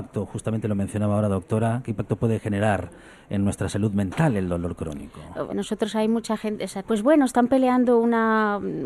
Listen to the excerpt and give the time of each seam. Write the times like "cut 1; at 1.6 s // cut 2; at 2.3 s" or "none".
cut 1; at 5.5 s // cut 2; at 6.8 s